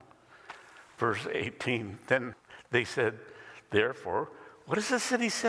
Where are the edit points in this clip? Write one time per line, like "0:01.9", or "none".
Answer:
none